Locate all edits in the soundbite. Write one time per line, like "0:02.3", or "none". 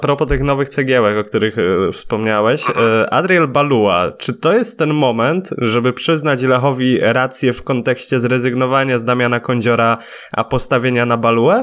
none